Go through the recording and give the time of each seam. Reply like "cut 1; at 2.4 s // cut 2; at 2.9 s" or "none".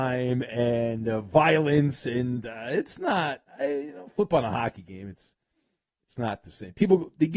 none